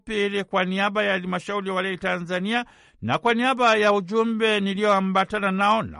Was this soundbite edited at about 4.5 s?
no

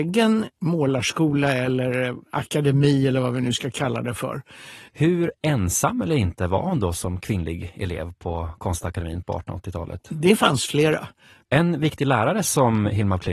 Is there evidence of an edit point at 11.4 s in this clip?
yes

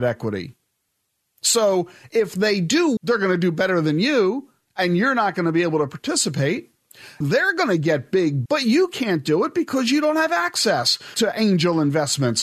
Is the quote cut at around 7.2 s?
yes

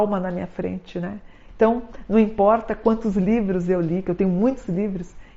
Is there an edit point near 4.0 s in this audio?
no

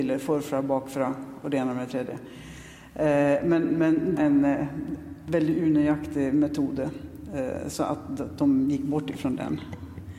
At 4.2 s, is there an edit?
yes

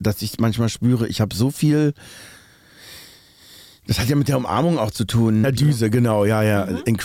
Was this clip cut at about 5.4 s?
yes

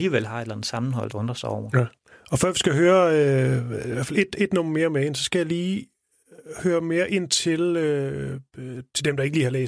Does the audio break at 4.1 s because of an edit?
no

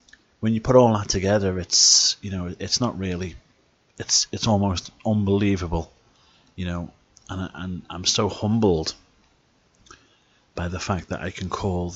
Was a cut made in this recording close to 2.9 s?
no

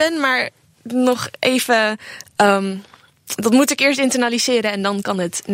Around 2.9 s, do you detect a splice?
no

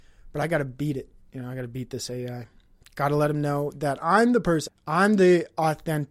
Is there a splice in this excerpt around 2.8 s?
no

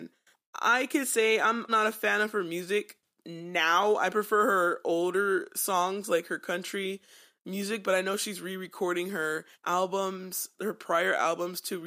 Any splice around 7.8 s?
no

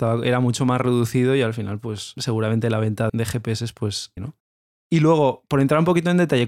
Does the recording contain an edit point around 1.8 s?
no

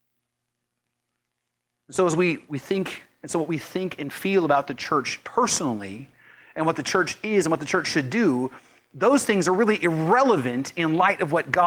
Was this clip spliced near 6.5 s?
no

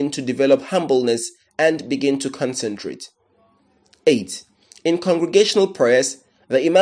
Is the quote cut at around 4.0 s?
no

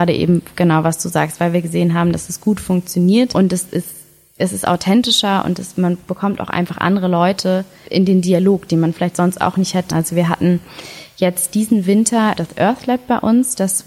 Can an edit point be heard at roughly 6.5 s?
no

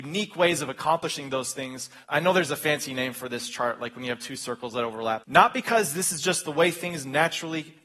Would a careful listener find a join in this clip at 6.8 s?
no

